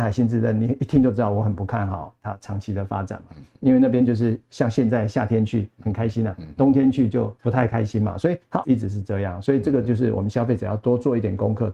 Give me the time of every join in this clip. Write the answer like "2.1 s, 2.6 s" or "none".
7.4 s, 8.6 s